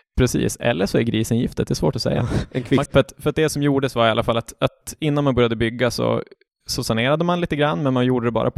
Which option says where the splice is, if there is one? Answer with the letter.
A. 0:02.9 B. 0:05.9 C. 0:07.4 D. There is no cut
A